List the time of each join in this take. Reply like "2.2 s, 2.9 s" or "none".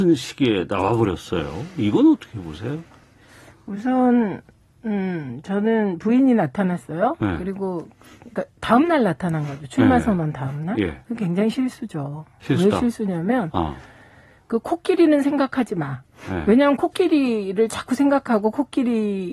none